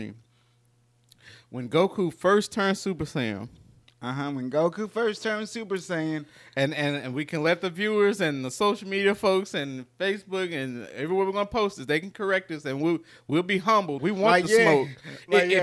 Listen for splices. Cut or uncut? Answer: cut